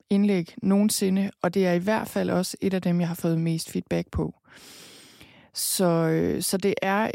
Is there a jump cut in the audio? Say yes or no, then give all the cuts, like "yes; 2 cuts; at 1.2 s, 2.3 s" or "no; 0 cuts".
no; 0 cuts